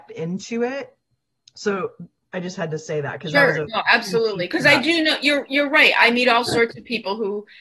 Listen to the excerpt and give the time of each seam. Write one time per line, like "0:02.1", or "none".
none